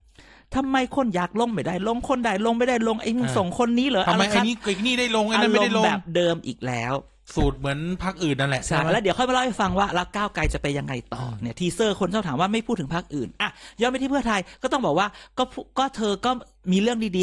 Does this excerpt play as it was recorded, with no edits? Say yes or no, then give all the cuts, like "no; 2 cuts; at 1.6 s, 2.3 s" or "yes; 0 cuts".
yes; 0 cuts